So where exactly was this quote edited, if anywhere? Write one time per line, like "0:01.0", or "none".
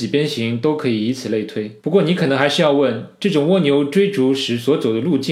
0:01.8